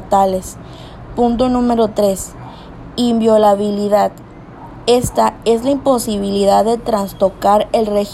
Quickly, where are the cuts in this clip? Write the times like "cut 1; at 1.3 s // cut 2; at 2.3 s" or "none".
none